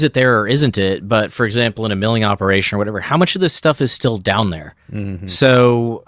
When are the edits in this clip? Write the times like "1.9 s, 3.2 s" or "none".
none